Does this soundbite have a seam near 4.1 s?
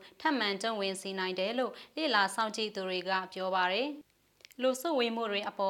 no; 0 cuts

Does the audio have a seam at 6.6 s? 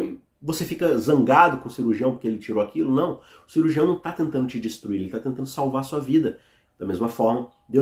yes; 1 cut; at 6.6 s

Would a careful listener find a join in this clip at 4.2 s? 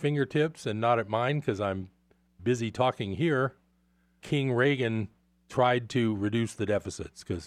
yes; 1 cut; at 4.2 s

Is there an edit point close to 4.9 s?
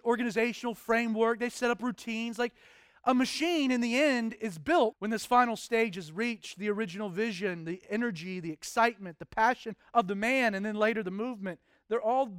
yes; 1 cut; at 4.9 s

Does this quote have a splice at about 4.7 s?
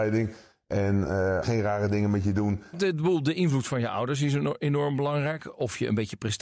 no; 2 cuts; at 1.4 s, 2.7 s

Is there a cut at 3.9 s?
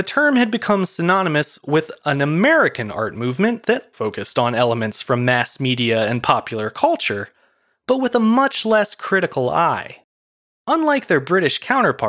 yes; 1 cut; at 3.9 s

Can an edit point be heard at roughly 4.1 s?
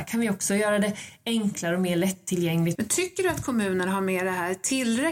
no; 1 cut; at 2.8 s

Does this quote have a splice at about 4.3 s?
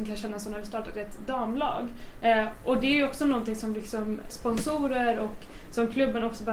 yes; 1 cut; at 4.3 s

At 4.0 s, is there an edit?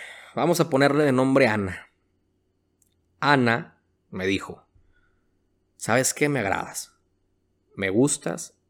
yes; 1 cut; at 4.0 s

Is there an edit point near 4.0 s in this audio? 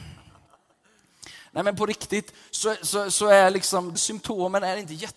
yes; 1 cut; at 4.0 s

